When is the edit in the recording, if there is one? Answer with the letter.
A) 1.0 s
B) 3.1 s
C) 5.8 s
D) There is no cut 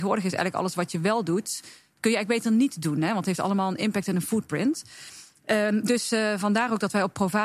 D